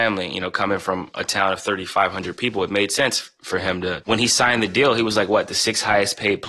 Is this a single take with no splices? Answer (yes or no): no